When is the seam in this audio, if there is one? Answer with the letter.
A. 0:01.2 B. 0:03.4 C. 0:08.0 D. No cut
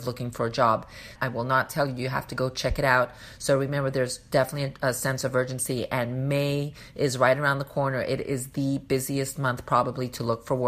A